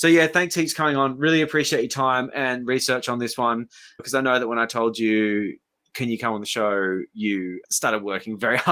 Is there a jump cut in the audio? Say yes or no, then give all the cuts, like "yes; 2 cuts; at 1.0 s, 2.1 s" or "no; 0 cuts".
no; 0 cuts